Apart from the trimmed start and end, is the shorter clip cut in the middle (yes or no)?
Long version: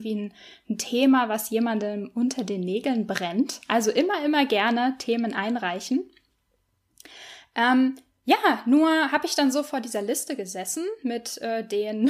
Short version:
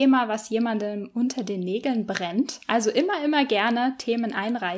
no